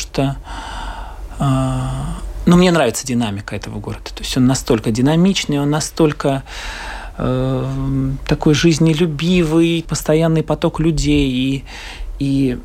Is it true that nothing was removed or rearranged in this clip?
no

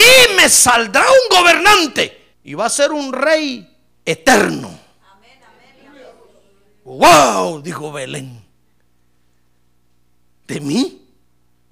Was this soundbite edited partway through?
yes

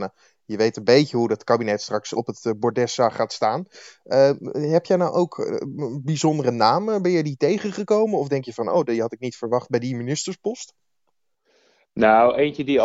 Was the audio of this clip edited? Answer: no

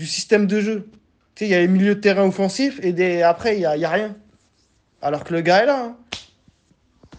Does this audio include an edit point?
no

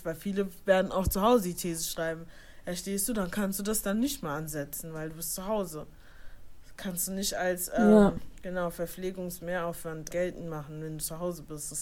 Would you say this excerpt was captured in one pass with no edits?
no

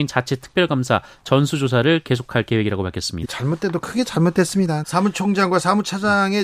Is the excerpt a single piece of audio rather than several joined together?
no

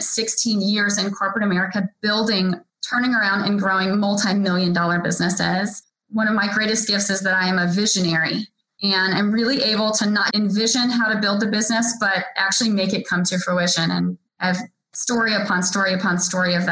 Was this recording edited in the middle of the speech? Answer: yes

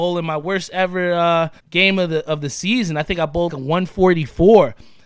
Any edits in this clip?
yes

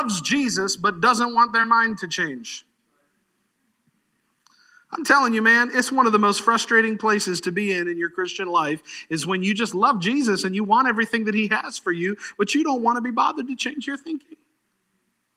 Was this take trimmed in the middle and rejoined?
no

